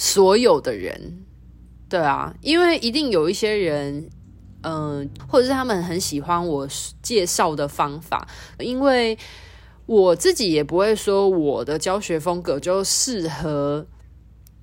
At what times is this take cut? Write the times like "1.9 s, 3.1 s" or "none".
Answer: 5.2 s, 8.6 s